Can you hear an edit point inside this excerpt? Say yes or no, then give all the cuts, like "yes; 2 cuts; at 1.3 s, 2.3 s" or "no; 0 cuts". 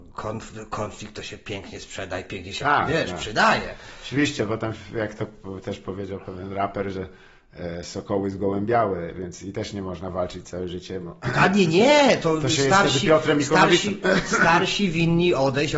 no; 0 cuts